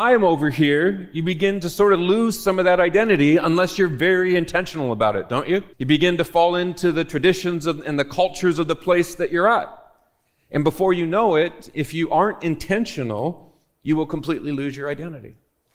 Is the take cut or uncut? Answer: cut